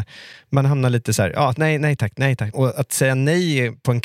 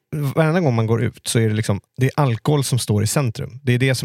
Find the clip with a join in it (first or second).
first